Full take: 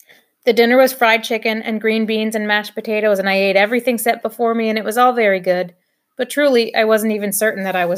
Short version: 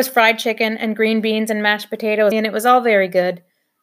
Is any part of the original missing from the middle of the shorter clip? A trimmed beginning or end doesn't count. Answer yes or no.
yes